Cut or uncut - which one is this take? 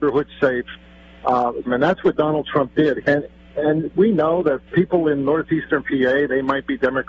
cut